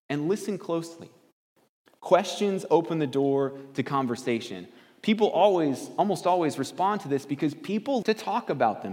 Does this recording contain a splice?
yes; 1 cut; at 8.0 s

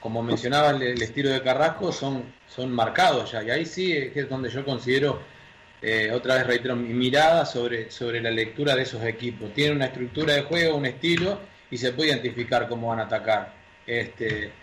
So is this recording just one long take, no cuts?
yes; 0 cuts

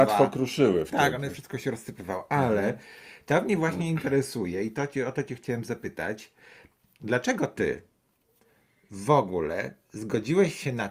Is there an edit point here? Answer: no; 0 cuts

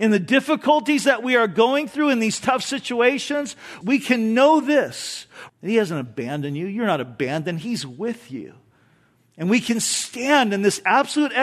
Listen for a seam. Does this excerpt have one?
yes; 2 cuts; at 3.8 s, 5.5 s

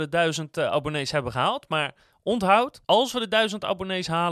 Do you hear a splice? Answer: yes; 1 cut; at 2.8 s

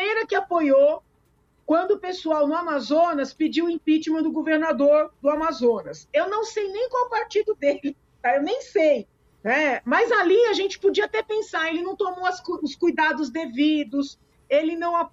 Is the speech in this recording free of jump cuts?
no; 1 cut; at 9.4 s

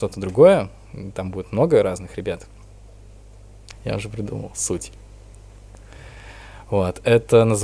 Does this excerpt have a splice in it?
yes; 1 cut; at 3.7 s

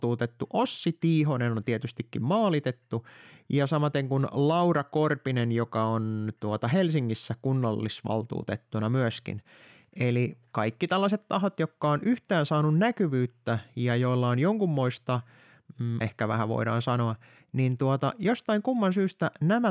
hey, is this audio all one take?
no; 1 cut; at 16.0 s

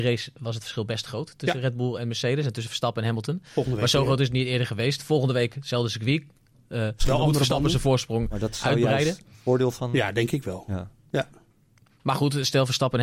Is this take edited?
no; 0 cuts

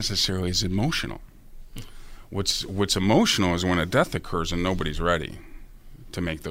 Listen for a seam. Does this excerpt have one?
no; 0 cuts

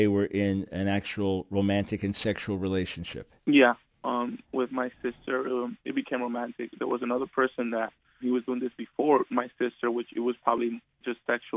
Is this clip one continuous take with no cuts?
no; 2 cuts; at 3.4 s, 8.2 s

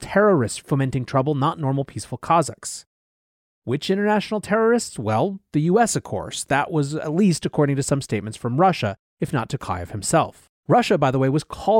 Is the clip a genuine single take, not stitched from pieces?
no; 1 cut; at 10.6 s

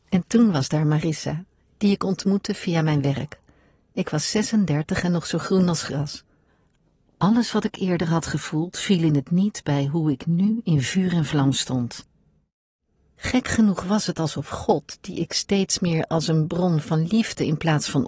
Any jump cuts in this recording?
no; 0 cuts

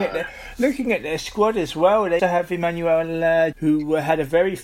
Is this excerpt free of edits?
no; 2 cuts; at 2.2 s, 3.5 s

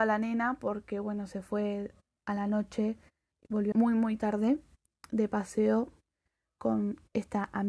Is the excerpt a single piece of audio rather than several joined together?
no; 1 cut; at 3.7 s

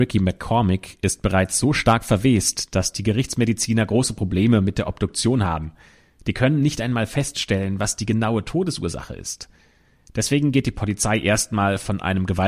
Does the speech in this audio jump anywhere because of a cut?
no; 0 cuts

